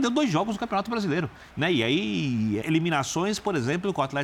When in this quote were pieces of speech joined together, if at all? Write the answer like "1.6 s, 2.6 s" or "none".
1.5 s, 2.6 s